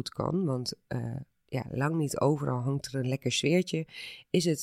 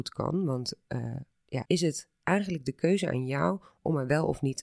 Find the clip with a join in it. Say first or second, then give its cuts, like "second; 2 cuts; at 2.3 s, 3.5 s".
second; 1 cut; at 1.6 s